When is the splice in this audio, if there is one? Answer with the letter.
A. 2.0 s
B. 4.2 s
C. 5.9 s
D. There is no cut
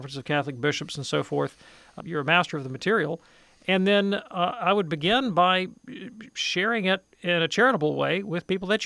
A